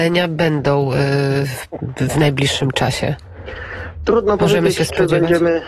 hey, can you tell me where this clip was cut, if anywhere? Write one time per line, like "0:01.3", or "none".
none